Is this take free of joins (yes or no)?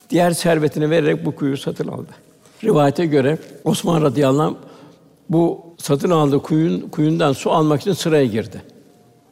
no